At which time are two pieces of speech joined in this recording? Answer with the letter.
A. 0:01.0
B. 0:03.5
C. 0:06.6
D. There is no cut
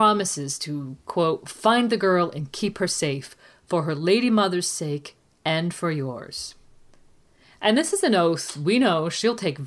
D